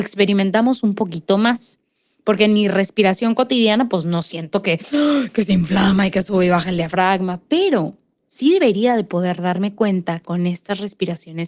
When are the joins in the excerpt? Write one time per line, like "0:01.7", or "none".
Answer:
none